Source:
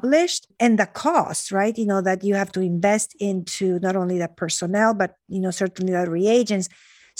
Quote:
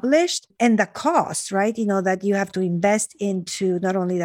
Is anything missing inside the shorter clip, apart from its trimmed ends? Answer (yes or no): no